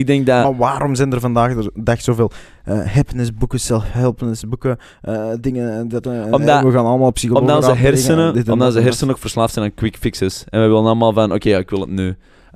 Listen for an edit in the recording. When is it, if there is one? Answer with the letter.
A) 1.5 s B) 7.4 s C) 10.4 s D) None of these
D